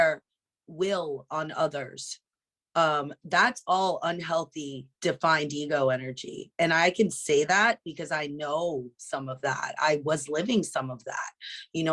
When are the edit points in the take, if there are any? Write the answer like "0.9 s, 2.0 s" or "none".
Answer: 4.9 s